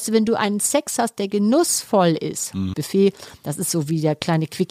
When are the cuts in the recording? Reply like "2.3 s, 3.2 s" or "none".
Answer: 2.7 s